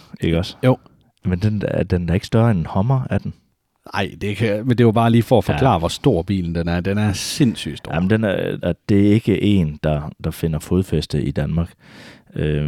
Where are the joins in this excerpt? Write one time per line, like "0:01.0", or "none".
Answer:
0:08.6

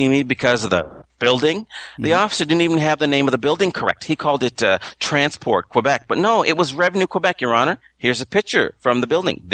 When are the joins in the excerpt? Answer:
none

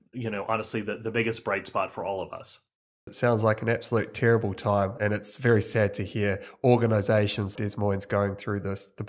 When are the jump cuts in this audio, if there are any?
0:03.1
0:05.0
0:07.6

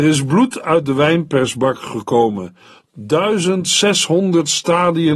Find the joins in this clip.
0:02.9

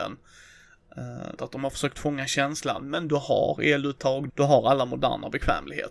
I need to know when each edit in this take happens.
0:01.4
0:04.3

